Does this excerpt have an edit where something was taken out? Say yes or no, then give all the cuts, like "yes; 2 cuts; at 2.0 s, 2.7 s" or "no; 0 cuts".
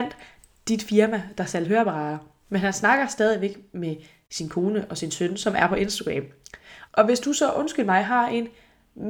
yes; 1 cut; at 6.9 s